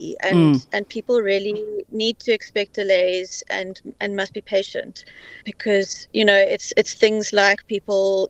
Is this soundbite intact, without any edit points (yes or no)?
no